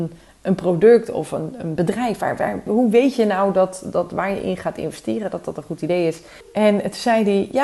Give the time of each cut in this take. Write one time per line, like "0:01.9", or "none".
0:02.7
0:06.4